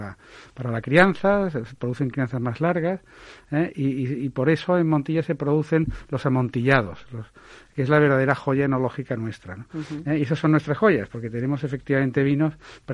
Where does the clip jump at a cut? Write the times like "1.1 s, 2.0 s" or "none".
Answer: 10.0 s